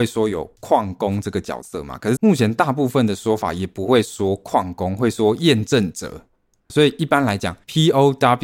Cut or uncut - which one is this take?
cut